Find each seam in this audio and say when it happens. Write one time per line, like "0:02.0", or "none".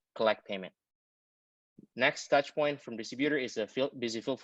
none